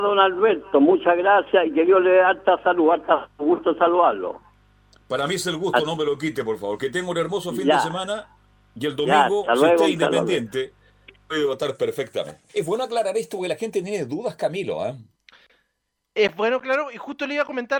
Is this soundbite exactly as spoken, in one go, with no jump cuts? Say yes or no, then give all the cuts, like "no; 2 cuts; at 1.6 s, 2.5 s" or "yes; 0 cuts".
no; 1 cut; at 12.5 s